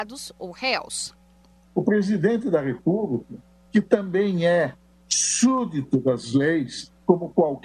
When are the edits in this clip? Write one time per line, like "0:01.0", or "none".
none